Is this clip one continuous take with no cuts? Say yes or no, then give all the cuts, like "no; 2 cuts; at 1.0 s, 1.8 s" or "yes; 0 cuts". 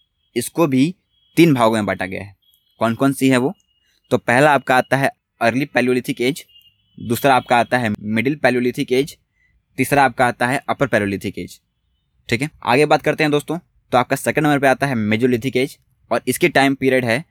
yes; 0 cuts